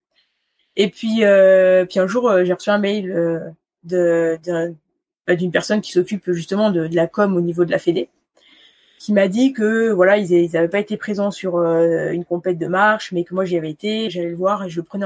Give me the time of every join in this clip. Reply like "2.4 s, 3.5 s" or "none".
14.1 s